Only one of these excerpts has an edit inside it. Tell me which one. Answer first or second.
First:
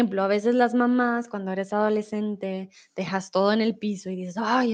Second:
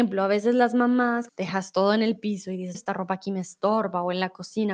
second